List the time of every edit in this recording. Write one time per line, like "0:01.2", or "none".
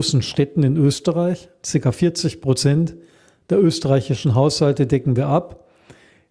none

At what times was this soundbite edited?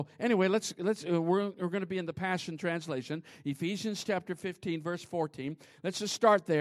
none

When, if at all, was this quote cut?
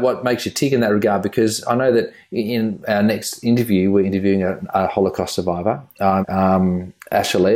0:06.2

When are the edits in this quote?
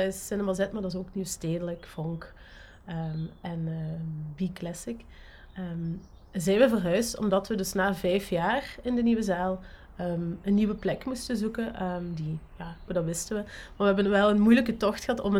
0:12.9

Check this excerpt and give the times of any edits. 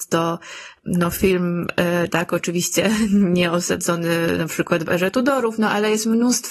0:02.1

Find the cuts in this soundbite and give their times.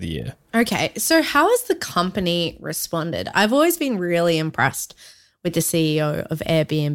none

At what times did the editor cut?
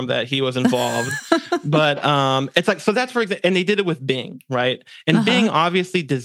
none

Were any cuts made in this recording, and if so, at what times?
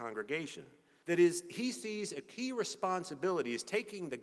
0:01.0

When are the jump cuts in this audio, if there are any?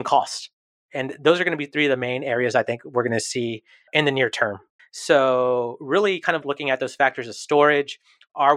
0:04.8
0:06.4

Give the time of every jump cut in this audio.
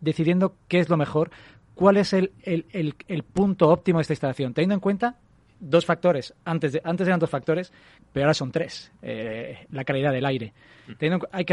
0:08.0

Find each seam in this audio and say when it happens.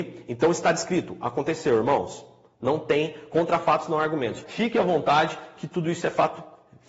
0:04.4

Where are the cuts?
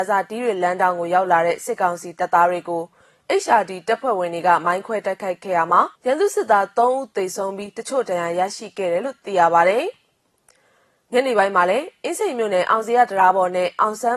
0:06.0

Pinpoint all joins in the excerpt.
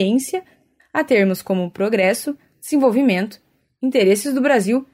0:02.5

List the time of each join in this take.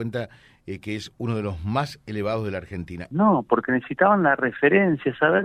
0:03.1

